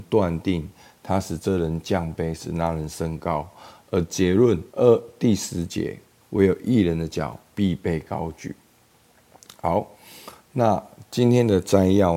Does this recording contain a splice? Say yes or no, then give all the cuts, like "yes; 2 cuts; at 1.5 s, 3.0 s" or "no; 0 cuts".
yes; 2 cuts; at 4.7 s, 6.2 s